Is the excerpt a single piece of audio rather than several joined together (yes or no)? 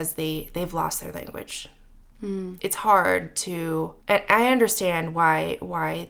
no